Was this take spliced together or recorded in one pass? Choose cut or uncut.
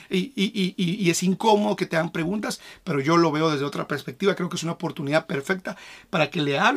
uncut